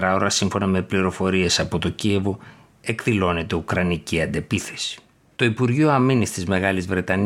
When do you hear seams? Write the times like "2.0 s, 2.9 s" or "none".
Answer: 5.3 s